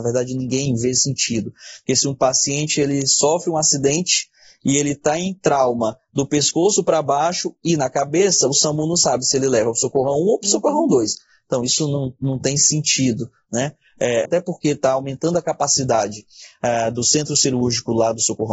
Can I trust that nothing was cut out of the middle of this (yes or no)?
no